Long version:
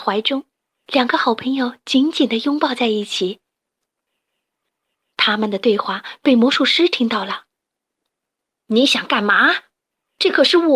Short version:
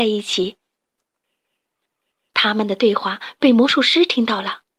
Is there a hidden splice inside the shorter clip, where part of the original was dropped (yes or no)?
no